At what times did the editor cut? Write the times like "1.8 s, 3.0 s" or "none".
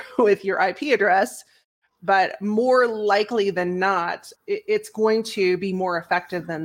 4.3 s